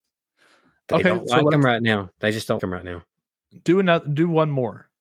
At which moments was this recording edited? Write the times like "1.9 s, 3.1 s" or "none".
2.6 s